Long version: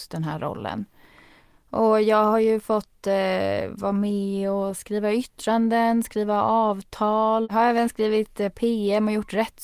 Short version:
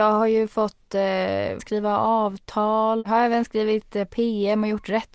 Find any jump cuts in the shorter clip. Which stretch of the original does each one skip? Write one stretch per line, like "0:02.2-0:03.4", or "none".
0:03.7-0:06.0